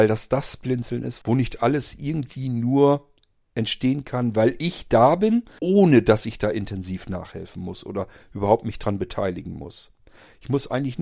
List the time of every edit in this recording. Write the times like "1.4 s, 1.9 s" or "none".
1.2 s, 5.6 s